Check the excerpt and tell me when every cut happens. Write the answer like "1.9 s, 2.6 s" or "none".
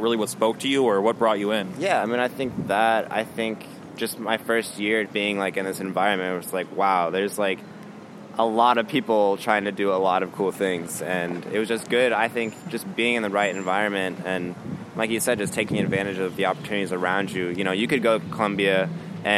5.1 s